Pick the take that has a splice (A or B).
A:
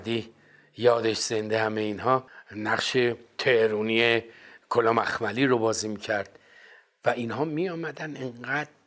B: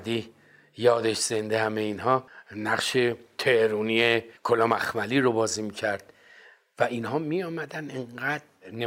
B